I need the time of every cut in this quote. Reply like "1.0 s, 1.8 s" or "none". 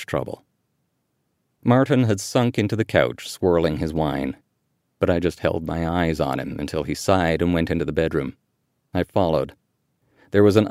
none